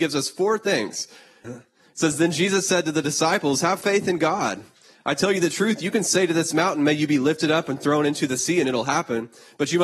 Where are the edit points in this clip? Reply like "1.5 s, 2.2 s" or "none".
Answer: 1.4 s